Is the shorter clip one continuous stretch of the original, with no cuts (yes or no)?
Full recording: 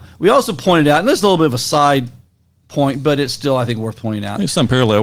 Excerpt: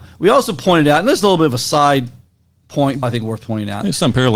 no